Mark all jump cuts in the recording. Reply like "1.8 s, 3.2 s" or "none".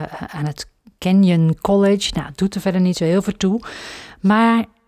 none